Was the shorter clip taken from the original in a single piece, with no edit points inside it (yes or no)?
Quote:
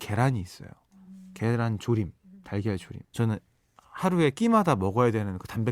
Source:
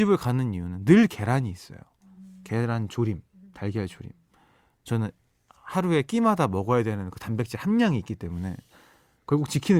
no